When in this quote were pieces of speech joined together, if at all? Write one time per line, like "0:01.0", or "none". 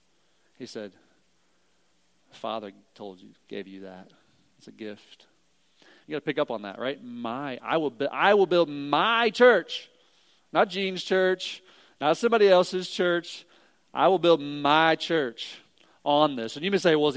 0:06.0

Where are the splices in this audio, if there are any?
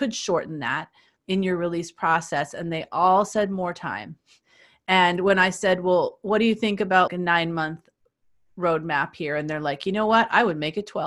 0:01.2
0:07.1

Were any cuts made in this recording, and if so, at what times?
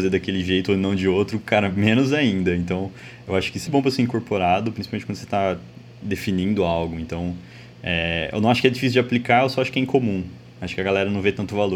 0:03.7

